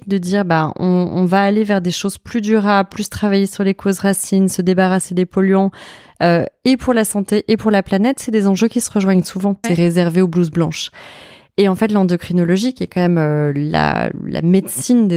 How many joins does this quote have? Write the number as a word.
one